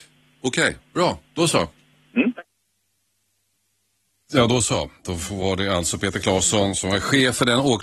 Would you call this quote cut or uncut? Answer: uncut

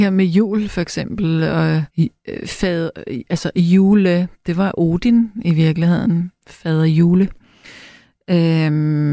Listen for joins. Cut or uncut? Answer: cut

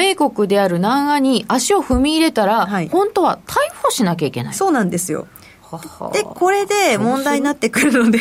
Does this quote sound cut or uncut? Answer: uncut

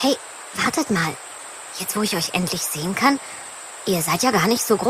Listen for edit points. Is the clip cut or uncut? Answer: uncut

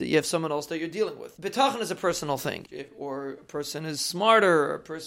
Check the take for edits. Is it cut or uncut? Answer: cut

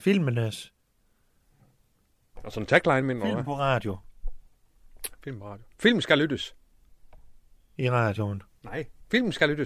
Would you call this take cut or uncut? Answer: uncut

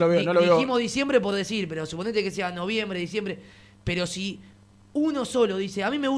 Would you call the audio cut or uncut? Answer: uncut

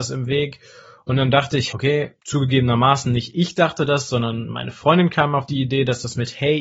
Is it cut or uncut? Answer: cut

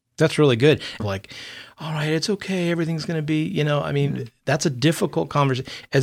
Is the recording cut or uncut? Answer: cut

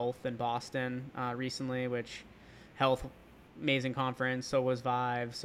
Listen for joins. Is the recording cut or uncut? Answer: uncut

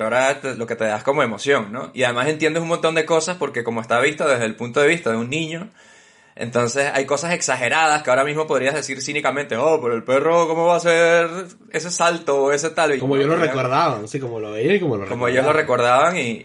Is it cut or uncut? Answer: cut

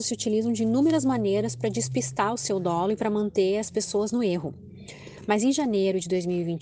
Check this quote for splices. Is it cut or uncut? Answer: uncut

